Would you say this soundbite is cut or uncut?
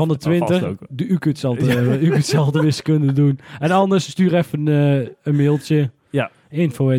uncut